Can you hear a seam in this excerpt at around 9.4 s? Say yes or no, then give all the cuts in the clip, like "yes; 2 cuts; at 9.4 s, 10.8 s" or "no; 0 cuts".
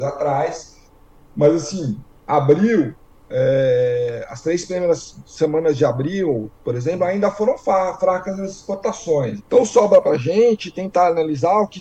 yes; 1 cut; at 9.4 s